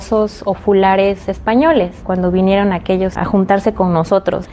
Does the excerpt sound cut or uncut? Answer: cut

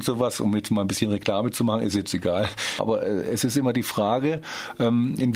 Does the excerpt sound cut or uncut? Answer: cut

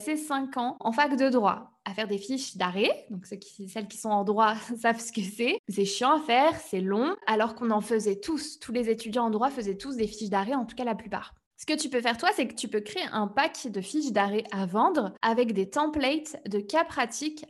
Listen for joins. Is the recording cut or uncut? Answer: uncut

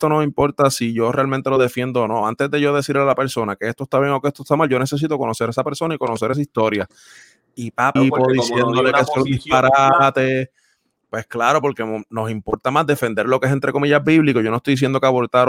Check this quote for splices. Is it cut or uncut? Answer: cut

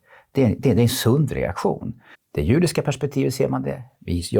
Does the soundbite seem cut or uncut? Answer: cut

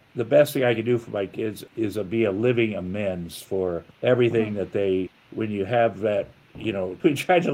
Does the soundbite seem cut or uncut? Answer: uncut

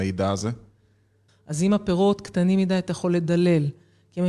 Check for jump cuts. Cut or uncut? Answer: cut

